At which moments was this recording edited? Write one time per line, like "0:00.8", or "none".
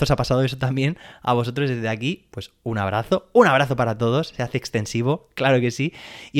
none